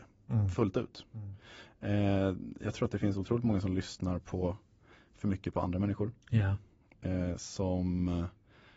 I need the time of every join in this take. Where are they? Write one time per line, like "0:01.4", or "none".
none